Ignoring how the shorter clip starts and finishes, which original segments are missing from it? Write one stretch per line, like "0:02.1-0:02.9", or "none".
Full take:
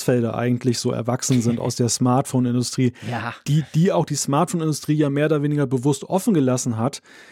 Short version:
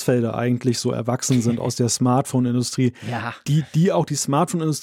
none